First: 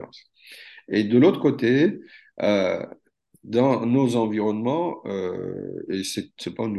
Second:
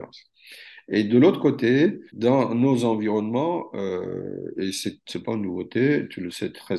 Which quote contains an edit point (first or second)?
second